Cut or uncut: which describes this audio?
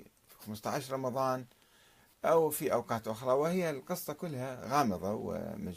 uncut